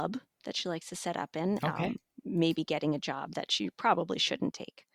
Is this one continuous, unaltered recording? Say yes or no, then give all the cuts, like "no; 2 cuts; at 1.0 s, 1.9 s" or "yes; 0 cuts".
yes; 0 cuts